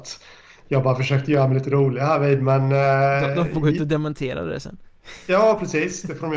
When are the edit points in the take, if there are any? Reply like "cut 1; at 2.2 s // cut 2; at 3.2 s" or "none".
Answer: none